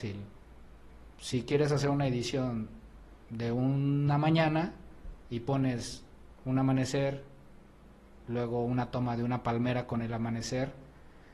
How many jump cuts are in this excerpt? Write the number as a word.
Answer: zero